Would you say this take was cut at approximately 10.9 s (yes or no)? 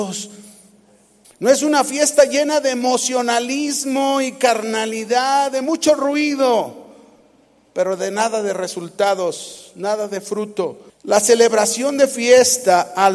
yes